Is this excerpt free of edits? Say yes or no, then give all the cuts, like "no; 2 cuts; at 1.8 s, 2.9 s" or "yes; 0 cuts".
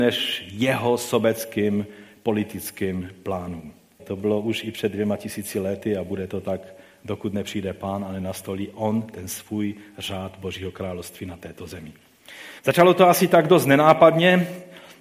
no; 2 cuts; at 4.0 s, 12.6 s